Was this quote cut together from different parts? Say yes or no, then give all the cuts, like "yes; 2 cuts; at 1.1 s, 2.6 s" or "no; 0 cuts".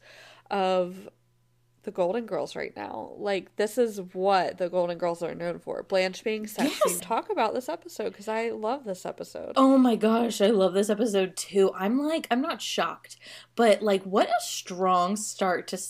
yes; 1 cut; at 7.0 s